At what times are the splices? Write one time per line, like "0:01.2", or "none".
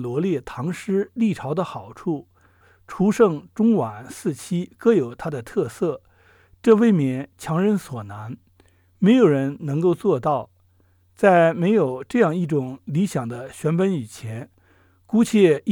none

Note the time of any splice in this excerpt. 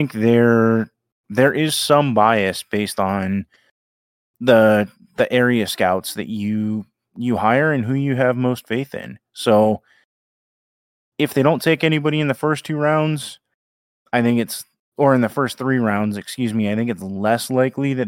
none

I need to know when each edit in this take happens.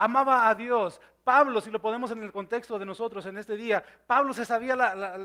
none

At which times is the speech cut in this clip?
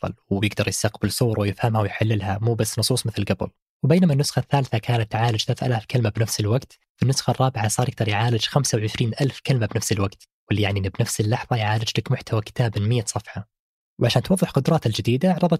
none

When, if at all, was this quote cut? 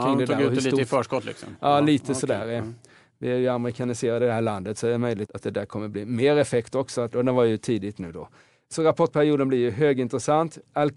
0:05.3
0:07.1

